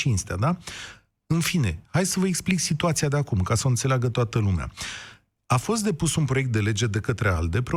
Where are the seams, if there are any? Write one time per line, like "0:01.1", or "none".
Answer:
none

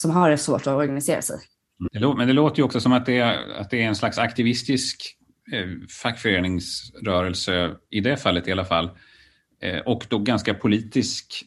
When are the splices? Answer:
0:01.9

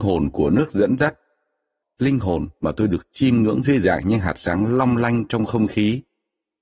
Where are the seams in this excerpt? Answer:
0:01.8

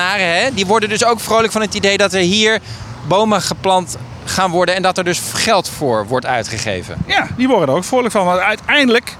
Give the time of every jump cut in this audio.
none

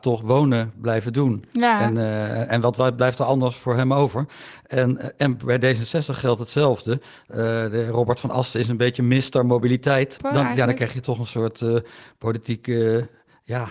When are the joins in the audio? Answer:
0:10.2

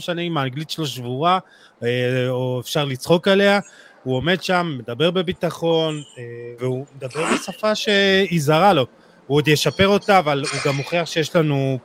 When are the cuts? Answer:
0:06.6

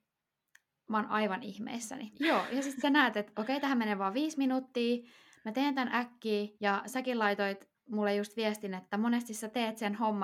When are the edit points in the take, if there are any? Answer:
0:02.1
0:06.5

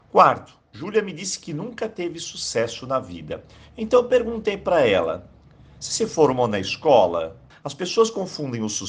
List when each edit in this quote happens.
0:07.5

